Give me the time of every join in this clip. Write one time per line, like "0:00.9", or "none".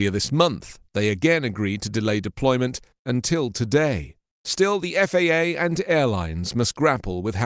none